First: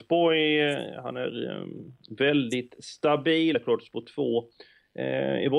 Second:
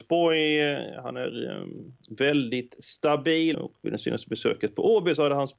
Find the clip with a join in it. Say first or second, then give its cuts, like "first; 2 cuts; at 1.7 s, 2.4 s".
second; 1 cut; at 3.5 s